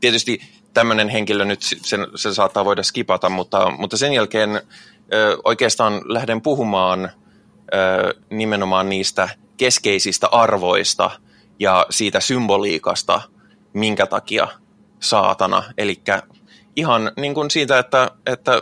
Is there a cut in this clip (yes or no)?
no